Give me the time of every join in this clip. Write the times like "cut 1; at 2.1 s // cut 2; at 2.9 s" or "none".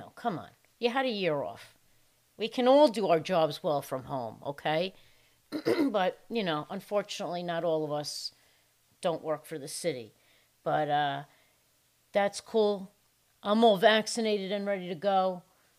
none